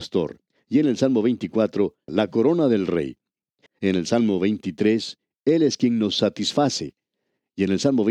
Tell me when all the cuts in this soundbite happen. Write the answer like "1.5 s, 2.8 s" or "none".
2.1 s, 3.7 s